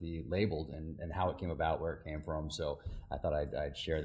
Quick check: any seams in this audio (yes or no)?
no